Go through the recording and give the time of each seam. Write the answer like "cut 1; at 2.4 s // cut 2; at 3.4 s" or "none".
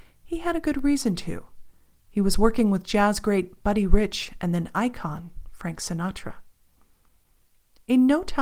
none